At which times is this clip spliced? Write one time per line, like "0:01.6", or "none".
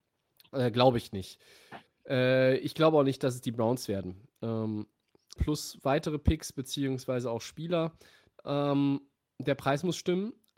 0:05.4
0:08.3